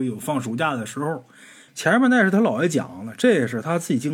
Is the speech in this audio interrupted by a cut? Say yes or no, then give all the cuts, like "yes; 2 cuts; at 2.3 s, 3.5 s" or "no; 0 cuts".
yes; 1 cut; at 1.7 s